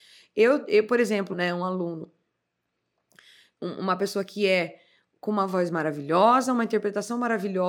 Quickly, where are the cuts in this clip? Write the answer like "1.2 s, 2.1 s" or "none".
1.3 s